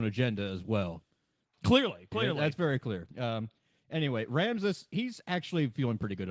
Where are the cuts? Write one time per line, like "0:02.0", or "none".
0:02.1